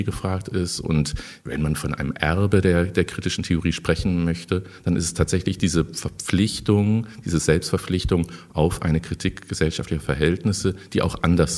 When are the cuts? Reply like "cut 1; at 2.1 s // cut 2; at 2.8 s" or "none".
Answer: none